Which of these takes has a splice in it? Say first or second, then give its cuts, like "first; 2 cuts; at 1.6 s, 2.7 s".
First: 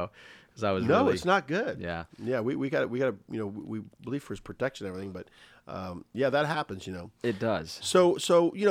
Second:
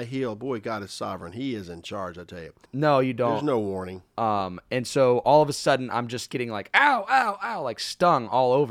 second; 1 cut; at 2.6 s